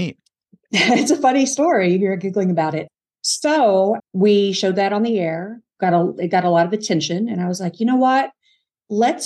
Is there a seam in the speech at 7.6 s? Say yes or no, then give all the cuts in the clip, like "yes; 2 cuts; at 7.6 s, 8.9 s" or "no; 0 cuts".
no; 1 cut; at 4.0 s